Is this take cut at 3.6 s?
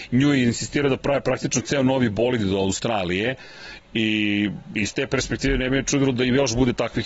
no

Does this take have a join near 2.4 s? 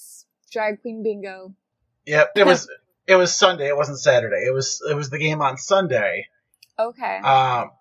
yes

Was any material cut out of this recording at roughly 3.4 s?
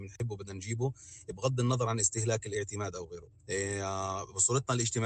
yes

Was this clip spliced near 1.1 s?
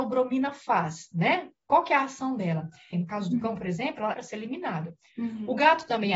no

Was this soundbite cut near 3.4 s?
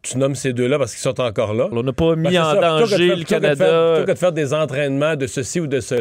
no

